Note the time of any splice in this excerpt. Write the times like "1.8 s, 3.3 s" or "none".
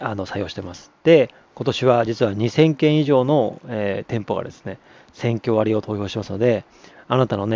none